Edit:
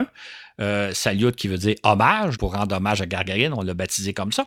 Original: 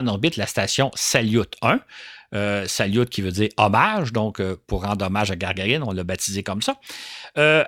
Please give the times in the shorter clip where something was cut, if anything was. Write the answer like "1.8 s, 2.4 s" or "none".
2.4 s